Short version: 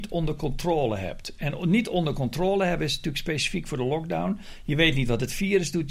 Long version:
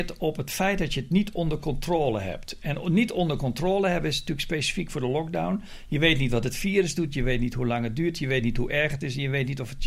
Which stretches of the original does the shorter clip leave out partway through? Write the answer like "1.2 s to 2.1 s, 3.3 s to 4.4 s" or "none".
none